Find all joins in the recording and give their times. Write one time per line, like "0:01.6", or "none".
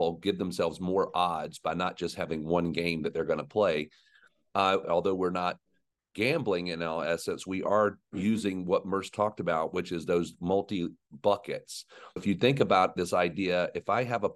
0:04.8
0:12.2